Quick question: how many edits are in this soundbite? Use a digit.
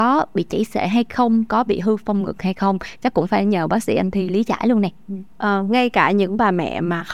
2